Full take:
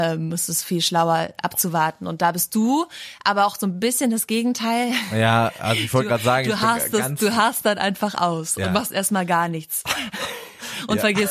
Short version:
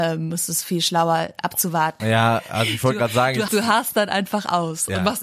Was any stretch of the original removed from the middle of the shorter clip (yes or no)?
yes